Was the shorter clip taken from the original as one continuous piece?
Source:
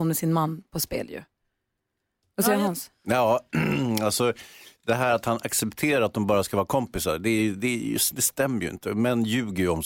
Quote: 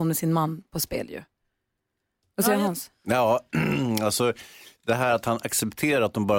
yes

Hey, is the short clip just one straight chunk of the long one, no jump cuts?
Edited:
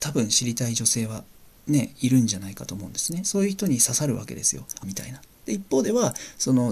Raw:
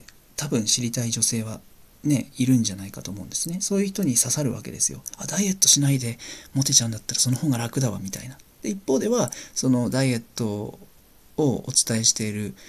no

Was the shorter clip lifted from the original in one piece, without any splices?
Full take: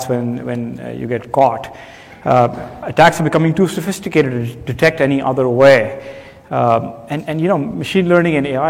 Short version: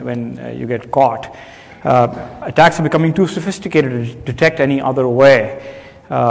yes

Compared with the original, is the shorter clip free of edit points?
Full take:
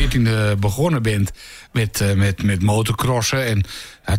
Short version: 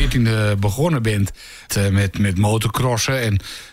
no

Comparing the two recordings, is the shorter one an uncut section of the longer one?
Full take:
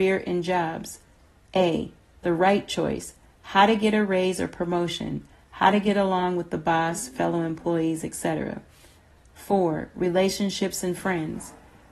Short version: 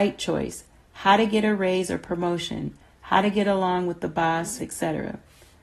no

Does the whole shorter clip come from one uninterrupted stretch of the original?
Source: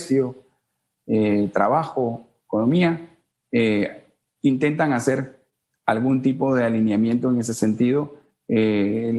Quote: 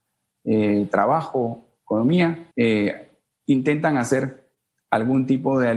no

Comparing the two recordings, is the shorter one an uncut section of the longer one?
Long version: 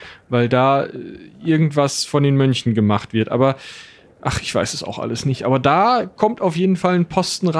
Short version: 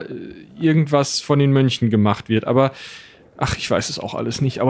yes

